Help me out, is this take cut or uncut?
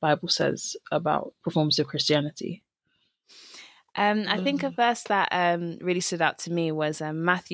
uncut